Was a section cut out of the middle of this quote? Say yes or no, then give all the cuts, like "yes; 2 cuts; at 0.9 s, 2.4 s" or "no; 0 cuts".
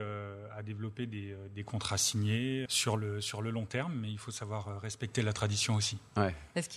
yes; 1 cut; at 2.7 s